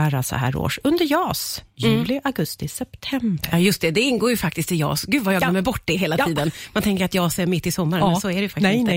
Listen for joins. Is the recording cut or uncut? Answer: uncut